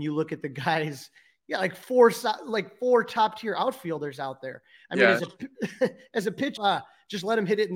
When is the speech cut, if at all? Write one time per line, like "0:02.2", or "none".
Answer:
0:06.6